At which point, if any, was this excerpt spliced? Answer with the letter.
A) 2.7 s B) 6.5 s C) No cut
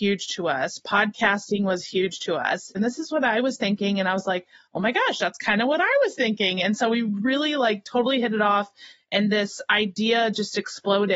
A